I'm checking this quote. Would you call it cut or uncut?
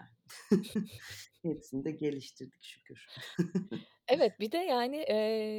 uncut